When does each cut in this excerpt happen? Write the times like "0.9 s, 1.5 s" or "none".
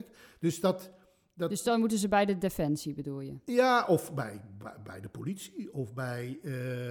none